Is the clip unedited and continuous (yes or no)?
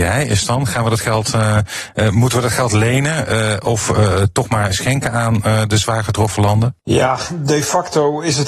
no